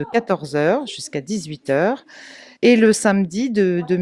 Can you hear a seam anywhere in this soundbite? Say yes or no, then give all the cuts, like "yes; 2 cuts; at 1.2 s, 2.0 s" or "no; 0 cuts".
yes; 1 cut; at 2.6 s